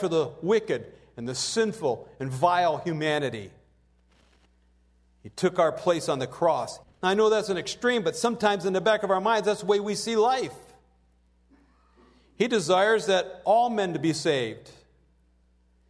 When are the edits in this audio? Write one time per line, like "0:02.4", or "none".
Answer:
0:06.8

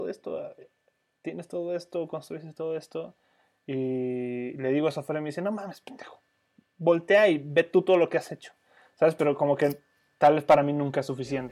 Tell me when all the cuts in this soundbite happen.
none

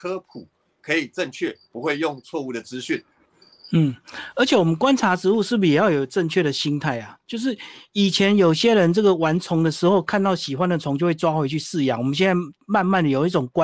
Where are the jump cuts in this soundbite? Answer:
none

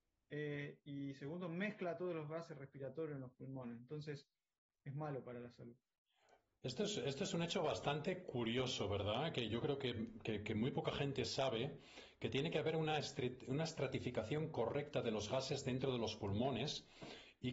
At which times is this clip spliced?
none

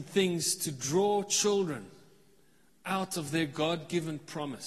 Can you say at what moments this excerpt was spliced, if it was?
none

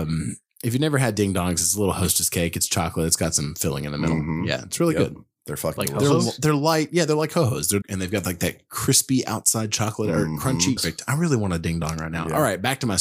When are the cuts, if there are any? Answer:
0:07.8
0:10.8

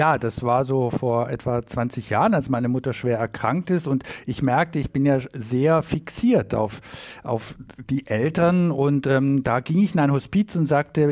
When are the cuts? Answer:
none

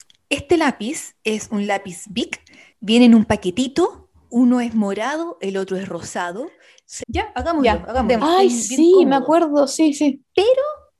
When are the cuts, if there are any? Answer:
0:04.3
0:07.0
0:08.2

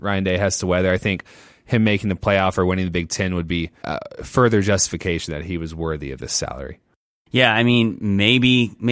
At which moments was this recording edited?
0:03.8

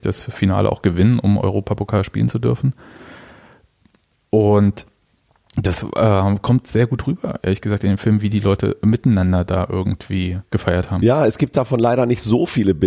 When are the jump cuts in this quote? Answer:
0:10.5

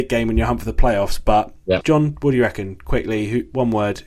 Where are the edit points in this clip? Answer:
0:01.8

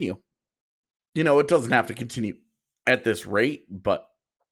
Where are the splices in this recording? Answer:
none

